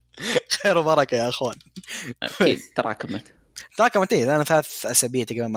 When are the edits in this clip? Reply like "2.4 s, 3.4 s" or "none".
none